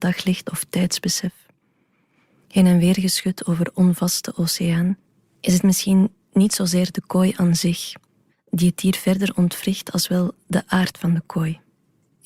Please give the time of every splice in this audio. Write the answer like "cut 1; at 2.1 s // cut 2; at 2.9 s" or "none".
cut 1; at 8.3 s